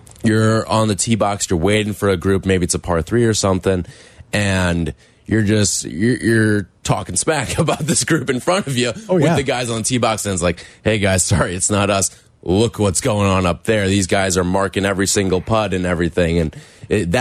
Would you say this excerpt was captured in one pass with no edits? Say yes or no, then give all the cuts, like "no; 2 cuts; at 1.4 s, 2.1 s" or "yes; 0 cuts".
yes; 0 cuts